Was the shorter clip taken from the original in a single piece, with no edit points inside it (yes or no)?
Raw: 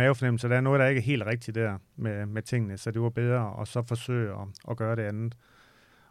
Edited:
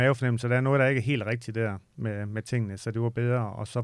yes